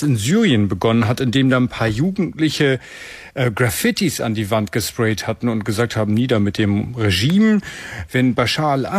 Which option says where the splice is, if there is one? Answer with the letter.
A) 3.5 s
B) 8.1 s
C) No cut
B